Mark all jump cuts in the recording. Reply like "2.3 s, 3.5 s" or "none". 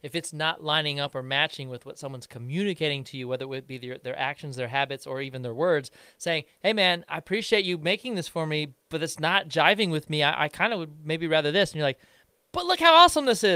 none